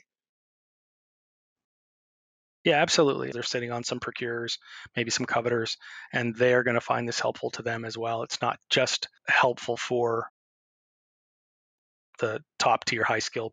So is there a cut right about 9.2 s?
yes; 2 cuts; at 3.3 s, 9.2 s

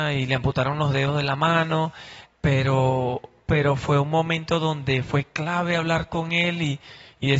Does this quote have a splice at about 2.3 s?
yes; 1 cut; at 2.3 s

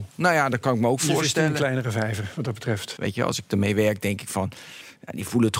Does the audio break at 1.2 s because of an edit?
no; 1 cut; at 3.0 s

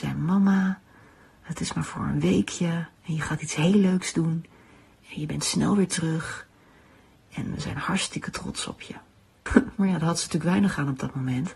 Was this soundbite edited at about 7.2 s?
no; 1 cut; at 9.5 s

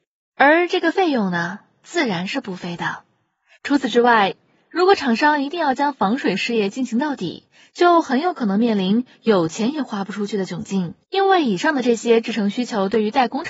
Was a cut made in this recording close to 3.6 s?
yes; 2 cuts; at 3.6 s, 11.0 s

